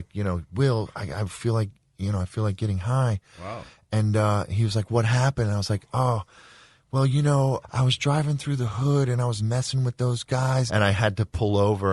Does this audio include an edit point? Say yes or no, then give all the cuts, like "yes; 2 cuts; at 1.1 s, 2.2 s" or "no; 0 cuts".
yes; 2 cuts; at 7.6 s, 10.7 s